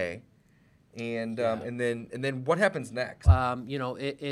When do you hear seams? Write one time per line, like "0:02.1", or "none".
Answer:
0:03.2